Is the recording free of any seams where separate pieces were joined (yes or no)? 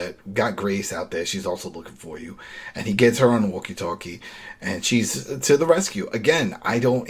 yes